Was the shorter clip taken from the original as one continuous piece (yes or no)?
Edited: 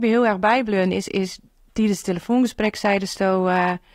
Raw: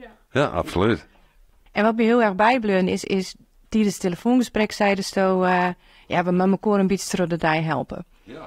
yes